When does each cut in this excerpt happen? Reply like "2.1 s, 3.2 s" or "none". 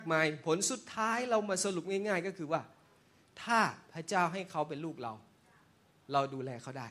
none